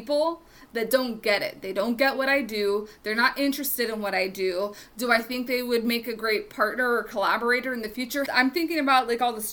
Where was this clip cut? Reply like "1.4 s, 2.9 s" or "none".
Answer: 8.3 s